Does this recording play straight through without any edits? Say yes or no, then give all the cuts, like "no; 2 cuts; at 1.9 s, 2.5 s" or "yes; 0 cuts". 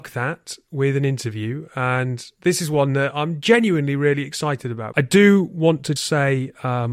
no; 2 cuts; at 4.9 s, 6.0 s